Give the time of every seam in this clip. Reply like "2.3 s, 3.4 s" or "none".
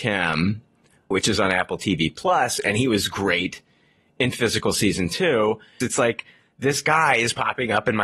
1.1 s, 5.8 s